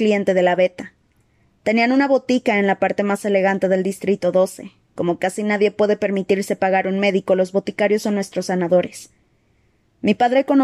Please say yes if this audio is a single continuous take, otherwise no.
yes